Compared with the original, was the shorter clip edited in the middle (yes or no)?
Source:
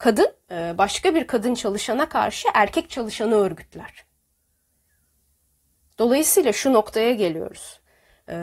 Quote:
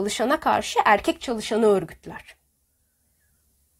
no